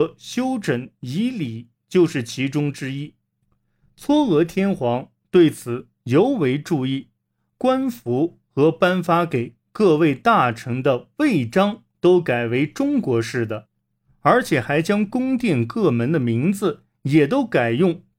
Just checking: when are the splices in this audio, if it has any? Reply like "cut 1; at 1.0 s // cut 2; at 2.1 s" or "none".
cut 1; at 7.6 s

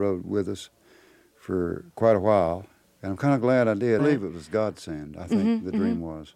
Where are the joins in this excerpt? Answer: cut 1; at 2.8 s // cut 2; at 4.0 s

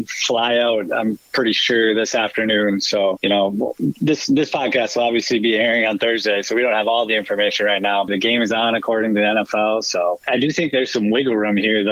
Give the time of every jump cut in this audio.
cut 1; at 8.1 s

